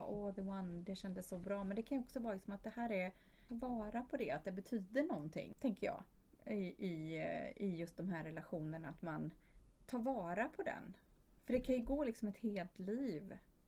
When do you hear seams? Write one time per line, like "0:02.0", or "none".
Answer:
0:03.5